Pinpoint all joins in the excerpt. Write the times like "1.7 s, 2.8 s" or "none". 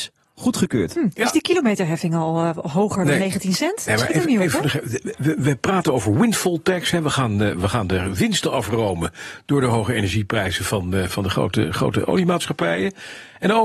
11.1 s